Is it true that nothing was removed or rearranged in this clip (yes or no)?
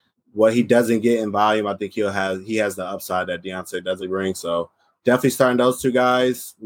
no